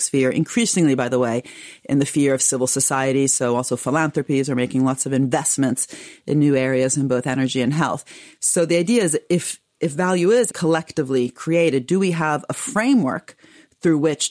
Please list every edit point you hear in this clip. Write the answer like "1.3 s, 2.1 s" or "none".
10.5 s